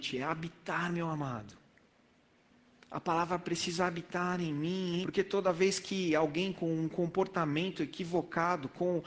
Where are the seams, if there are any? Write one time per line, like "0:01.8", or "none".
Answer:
0:05.0